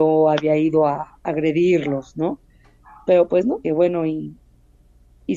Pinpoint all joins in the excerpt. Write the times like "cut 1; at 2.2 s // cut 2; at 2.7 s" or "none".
cut 1; at 3.6 s